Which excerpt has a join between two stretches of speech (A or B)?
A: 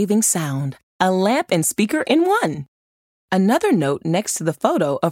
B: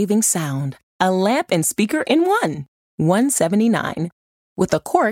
B